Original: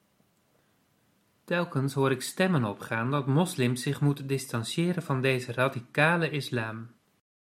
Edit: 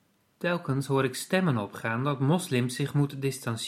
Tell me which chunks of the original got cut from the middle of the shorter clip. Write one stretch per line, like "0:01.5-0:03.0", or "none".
none